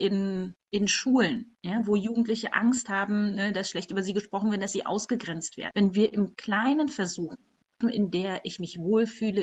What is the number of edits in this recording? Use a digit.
2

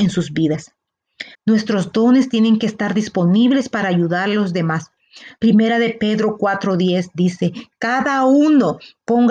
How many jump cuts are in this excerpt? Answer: 2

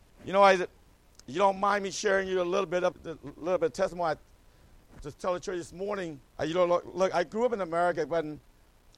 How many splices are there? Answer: 2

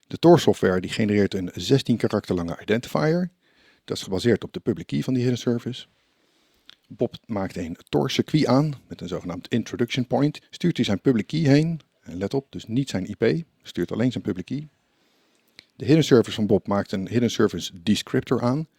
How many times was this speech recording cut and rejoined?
1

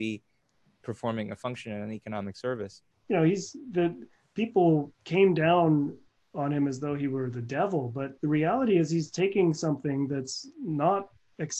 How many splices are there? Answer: 3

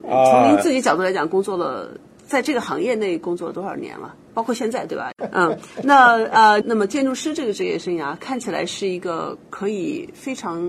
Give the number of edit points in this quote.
2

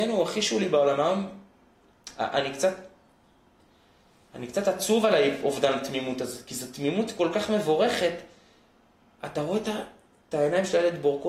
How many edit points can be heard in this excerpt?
0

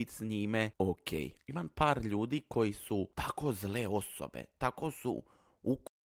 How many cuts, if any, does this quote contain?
0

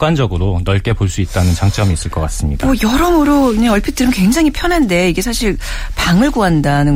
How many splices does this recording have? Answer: 0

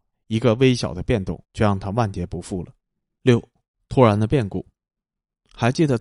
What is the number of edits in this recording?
2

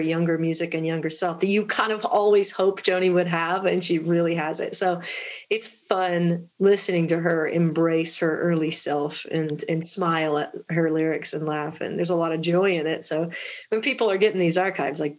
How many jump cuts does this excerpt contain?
0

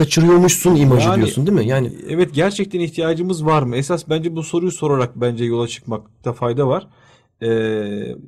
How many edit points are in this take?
0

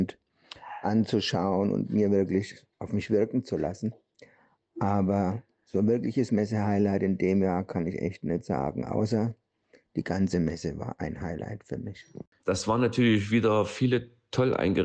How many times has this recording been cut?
1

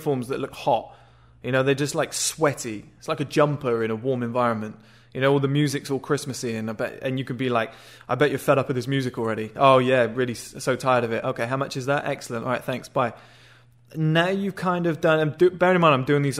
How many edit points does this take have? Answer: 0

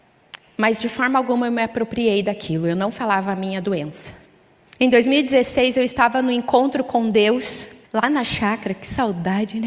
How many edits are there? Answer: 2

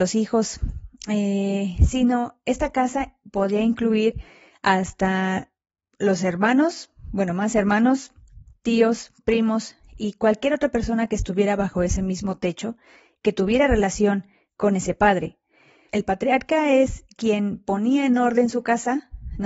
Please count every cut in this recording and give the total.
1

